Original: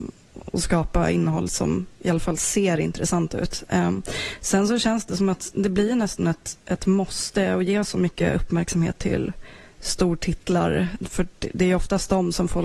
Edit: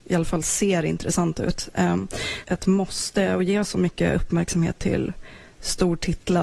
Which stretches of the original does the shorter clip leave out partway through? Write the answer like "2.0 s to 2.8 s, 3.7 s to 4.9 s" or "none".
4.4 s to 6.6 s